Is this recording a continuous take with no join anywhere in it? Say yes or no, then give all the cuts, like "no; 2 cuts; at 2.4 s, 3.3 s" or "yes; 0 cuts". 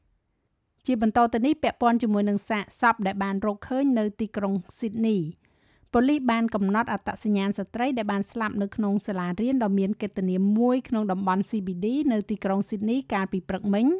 yes; 0 cuts